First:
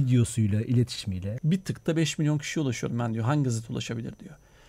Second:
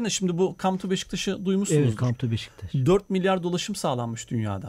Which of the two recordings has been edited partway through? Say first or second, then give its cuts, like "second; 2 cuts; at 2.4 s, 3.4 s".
first; 1 cut; at 1.4 s